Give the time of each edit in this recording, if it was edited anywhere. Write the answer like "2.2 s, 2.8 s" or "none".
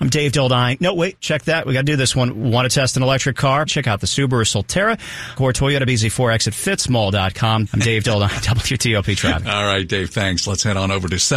3.7 s, 5.4 s, 7.7 s